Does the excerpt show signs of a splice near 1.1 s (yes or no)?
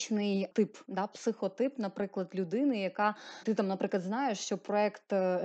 no